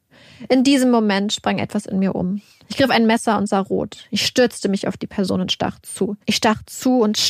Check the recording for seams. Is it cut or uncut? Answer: uncut